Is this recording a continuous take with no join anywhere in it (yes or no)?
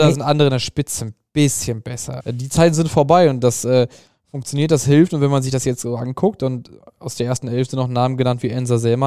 no